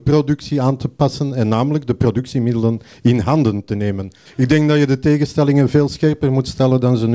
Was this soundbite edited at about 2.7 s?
no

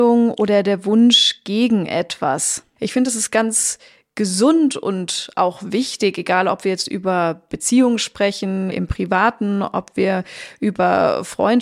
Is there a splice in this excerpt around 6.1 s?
no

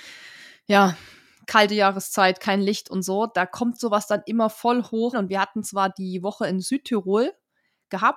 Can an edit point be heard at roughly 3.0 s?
no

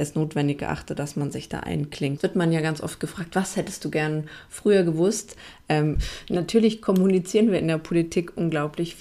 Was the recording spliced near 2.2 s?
yes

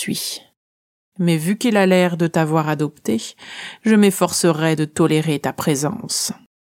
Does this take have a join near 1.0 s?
no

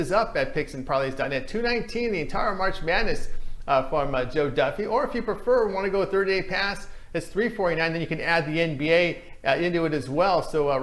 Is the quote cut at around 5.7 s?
no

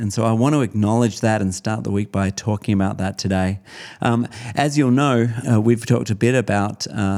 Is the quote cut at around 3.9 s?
no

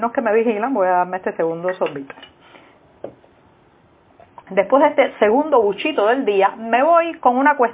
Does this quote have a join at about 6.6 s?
no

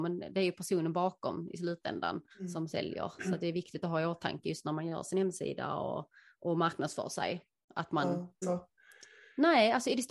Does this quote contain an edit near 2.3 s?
yes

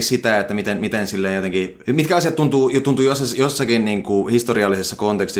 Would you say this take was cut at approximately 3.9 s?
no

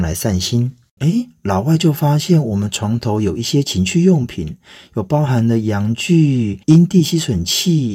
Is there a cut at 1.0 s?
yes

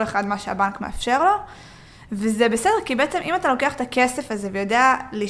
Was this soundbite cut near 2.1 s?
no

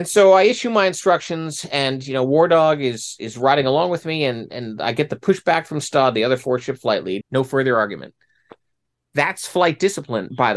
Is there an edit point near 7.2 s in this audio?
yes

